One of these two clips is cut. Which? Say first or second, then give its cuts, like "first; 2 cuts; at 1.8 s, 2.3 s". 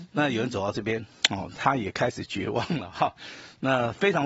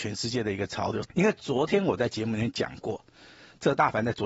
second; 1 cut; at 1.1 s